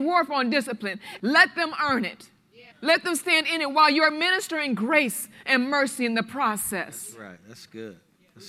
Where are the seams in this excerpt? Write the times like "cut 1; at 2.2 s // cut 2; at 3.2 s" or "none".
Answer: cut 1; at 1.2 s // cut 2; at 2.7 s